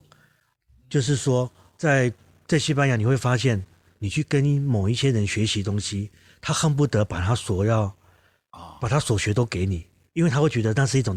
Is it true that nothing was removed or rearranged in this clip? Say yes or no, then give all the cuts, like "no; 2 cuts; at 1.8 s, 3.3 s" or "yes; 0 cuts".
yes; 0 cuts